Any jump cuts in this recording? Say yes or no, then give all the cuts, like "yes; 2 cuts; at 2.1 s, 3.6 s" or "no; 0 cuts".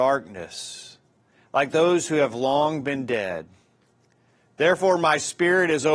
no; 0 cuts